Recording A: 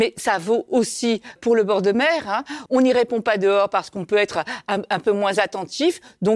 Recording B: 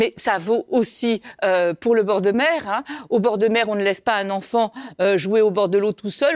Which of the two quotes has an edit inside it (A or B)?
A